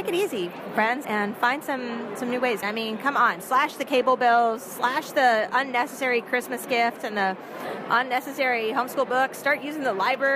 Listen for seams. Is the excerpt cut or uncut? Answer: cut